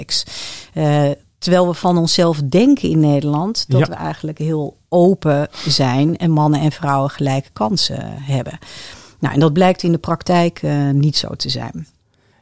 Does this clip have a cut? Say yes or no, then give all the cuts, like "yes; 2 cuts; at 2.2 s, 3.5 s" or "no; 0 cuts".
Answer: no; 0 cuts